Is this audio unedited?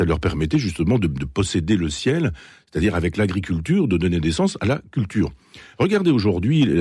yes; 0 cuts

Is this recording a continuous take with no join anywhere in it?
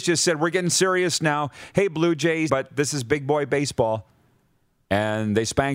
no; 1 cut; at 2.5 s

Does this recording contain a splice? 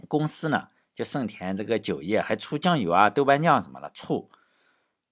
no; 0 cuts

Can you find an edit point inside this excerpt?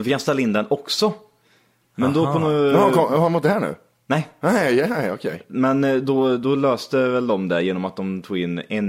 no; 0 cuts

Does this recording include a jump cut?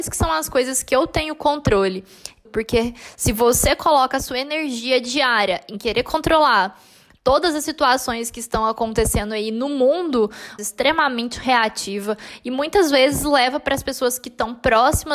yes; 2 cuts; at 2.4 s, 10.6 s

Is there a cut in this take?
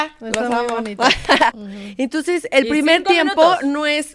yes; 1 cut; at 1.5 s

